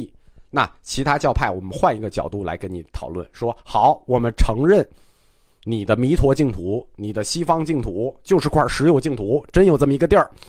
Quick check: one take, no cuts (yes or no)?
yes